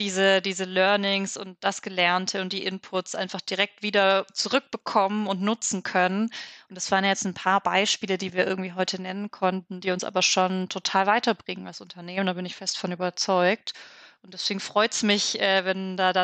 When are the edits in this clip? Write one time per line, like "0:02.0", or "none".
none